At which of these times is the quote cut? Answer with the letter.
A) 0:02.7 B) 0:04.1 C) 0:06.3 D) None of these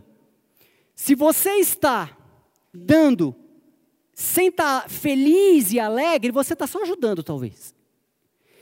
A